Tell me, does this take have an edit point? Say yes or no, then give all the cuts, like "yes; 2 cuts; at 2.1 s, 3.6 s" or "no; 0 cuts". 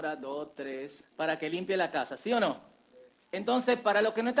yes; 2 cuts; at 1.1 s, 3.2 s